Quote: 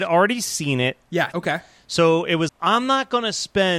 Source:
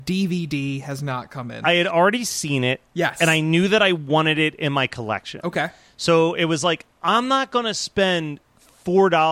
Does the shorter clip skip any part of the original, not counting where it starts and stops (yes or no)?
yes